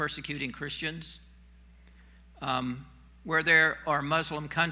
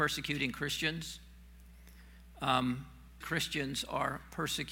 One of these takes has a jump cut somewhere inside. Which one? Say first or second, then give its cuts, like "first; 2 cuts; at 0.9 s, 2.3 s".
second; 1 cut; at 3.2 s